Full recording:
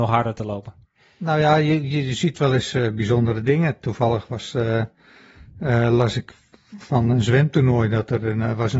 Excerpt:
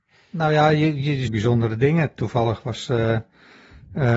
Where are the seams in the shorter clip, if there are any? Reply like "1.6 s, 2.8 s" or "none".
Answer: 1.3 s